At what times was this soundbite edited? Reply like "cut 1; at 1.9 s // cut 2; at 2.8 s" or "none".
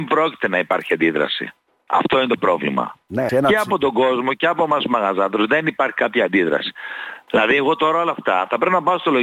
cut 1; at 3.3 s // cut 2; at 7.3 s